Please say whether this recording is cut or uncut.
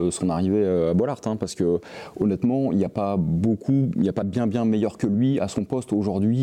uncut